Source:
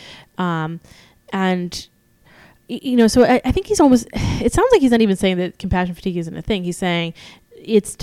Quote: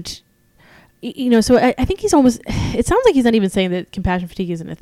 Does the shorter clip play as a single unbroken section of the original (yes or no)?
yes